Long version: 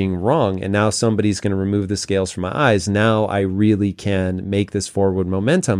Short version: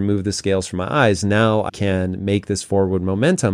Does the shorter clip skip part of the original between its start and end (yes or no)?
yes